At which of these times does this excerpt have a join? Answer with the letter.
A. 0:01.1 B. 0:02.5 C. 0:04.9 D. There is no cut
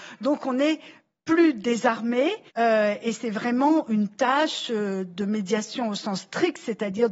B